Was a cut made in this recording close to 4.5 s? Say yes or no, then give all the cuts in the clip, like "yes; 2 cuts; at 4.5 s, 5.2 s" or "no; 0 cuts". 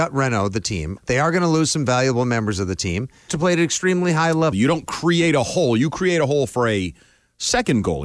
yes; 3 cuts; at 1.0 s, 3.3 s, 4.5 s